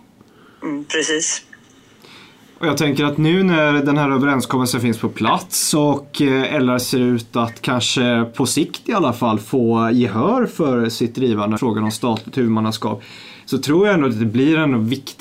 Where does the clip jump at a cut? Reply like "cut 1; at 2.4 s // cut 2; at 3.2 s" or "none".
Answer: cut 1; at 11.6 s